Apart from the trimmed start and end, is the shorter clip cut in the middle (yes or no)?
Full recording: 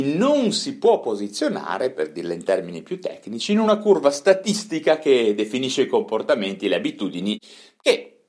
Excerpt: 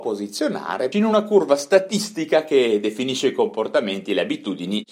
yes